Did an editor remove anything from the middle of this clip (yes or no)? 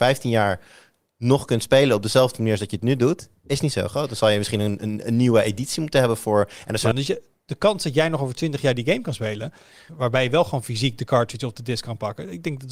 yes